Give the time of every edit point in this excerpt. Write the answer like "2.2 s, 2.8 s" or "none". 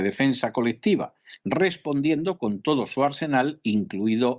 none

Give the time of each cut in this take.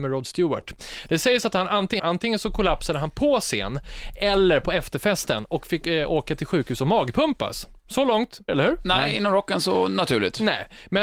2.0 s, 8.5 s

